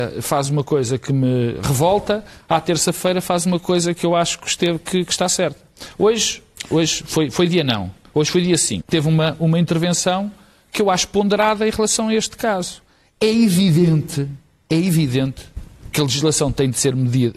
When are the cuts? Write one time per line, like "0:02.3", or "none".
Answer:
0:08.8